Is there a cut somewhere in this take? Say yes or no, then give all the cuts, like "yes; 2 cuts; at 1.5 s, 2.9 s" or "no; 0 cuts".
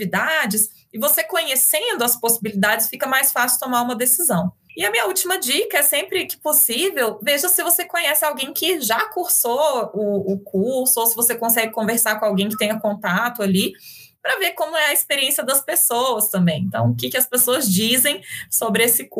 no; 0 cuts